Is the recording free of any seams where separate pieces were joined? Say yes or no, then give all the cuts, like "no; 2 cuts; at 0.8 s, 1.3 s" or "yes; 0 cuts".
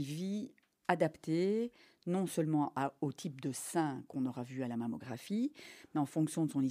yes; 0 cuts